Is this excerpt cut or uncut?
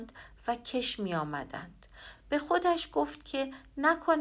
uncut